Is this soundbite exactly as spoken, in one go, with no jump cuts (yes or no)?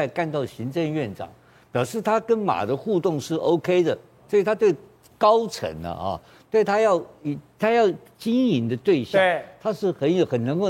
yes